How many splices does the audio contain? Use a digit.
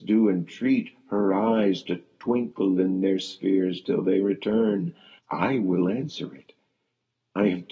1